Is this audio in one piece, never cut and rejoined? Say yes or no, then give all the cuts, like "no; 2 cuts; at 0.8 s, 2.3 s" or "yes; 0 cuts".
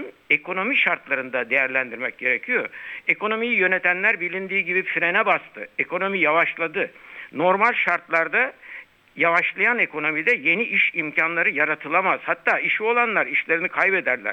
yes; 0 cuts